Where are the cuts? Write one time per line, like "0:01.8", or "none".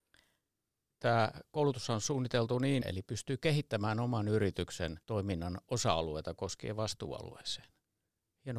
0:00.9
0:02.8
0:05.0